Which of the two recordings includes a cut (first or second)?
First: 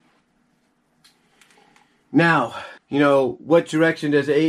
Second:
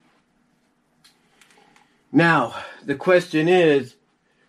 first